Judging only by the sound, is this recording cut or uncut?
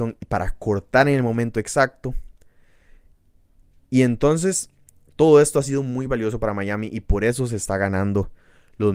uncut